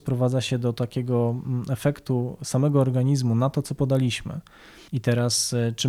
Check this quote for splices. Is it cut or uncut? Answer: cut